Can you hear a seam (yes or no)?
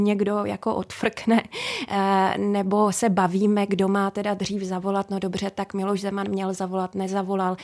no